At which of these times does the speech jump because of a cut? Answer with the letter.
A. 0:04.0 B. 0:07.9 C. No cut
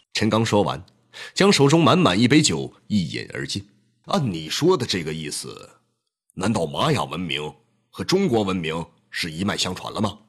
A